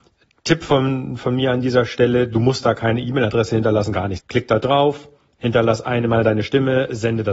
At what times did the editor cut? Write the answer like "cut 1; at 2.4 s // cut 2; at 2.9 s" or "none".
cut 1; at 4.2 s